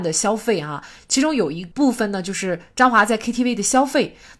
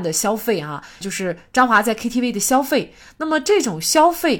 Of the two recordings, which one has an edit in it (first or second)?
second